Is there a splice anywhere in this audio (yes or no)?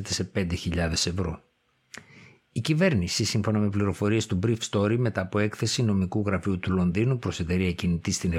no